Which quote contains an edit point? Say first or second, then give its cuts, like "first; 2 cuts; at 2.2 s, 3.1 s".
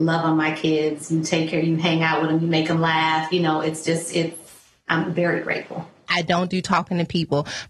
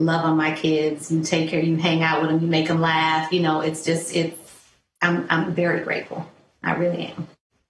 first; 2 cuts; at 4.9 s, 6.1 s